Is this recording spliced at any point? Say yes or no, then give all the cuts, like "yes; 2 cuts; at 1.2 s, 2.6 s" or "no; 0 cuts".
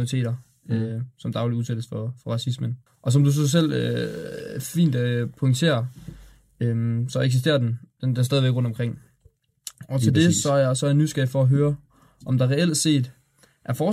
yes; 1 cut; at 2.9 s